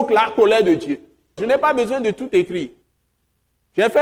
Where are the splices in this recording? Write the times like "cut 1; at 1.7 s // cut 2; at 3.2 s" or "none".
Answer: cut 1; at 1.4 s

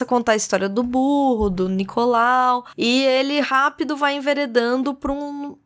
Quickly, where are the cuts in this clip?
cut 1; at 2.7 s

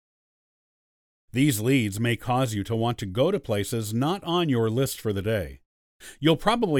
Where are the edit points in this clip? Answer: cut 1; at 1.3 s

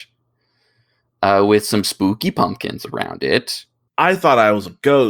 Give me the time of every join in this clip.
cut 1; at 3.9 s

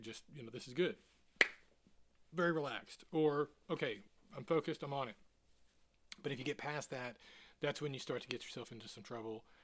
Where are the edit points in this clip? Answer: none

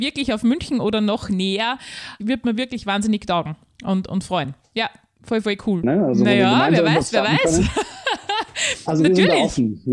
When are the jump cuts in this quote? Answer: cut 1; at 5.8 s

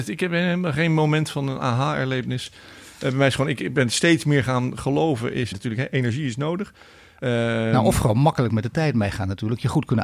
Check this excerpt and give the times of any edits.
cut 1; at 5.5 s

